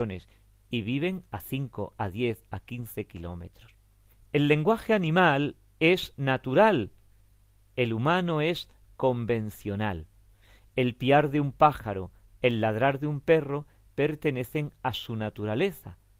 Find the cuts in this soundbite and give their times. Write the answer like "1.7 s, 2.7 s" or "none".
none